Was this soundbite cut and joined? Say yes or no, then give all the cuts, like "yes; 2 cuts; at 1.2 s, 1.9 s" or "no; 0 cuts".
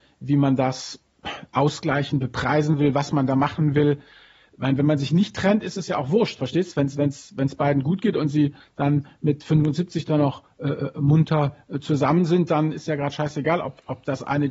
no; 0 cuts